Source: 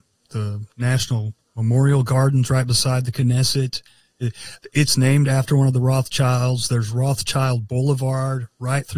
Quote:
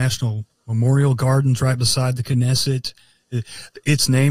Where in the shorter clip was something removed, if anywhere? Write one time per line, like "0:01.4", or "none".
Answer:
none